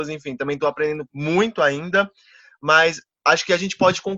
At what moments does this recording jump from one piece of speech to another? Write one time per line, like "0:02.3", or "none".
none